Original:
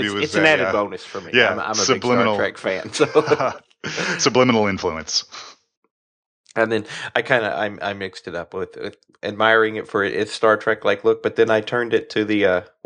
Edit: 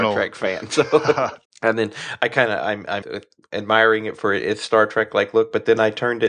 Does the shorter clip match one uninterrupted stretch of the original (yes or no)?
no